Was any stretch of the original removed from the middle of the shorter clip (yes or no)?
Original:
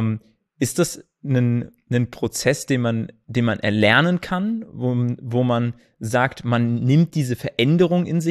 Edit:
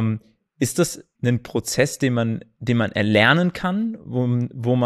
yes